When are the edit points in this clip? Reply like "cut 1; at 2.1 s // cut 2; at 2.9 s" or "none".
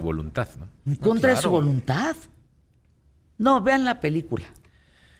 none